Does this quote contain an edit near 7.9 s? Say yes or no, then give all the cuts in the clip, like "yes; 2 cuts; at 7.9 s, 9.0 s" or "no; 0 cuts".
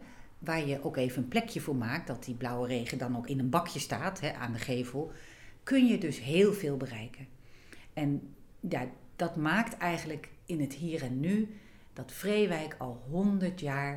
no; 1 cut; at 3.3 s